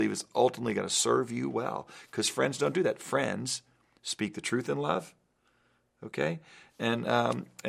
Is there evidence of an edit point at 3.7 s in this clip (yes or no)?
no